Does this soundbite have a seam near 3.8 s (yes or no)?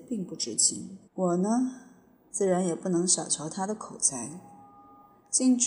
no